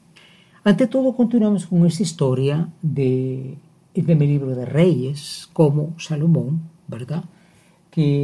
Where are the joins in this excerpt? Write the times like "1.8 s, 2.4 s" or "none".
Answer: none